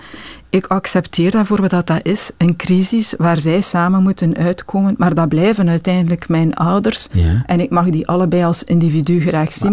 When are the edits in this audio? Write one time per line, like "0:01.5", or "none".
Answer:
none

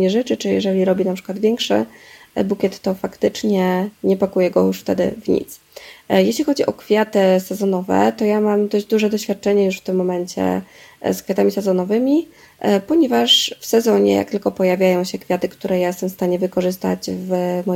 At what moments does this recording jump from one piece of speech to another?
none

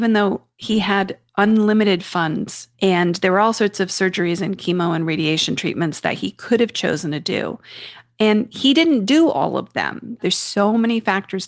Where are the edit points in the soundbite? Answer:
0:02.7
0:10.2

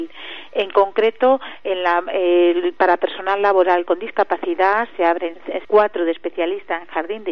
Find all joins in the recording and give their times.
0:05.6

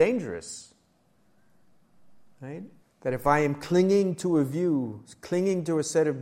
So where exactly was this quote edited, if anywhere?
0:02.8

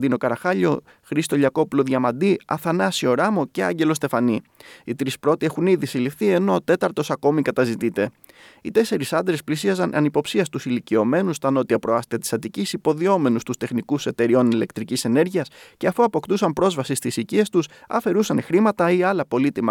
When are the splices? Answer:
none

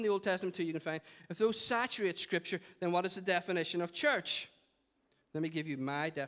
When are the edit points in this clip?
none

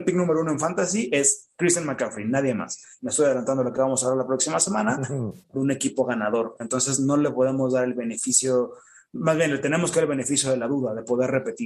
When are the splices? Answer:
0:03.0
0:05.5

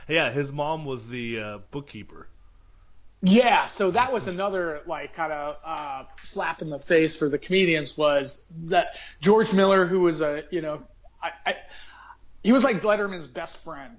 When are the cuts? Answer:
none

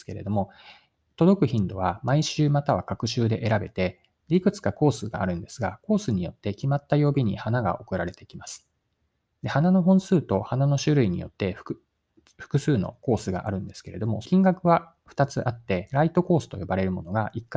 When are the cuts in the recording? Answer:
0:14.2

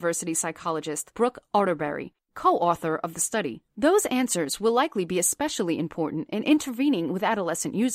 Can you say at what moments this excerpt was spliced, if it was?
0:03.7

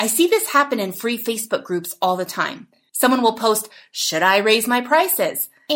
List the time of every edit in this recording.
none

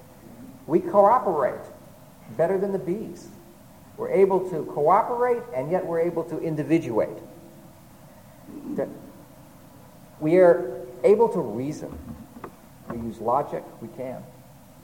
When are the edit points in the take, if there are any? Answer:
0:12.8

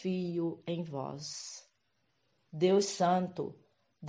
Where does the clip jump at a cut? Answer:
0:02.5

